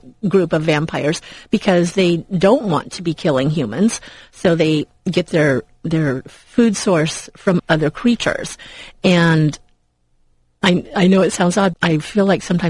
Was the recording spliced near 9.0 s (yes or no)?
no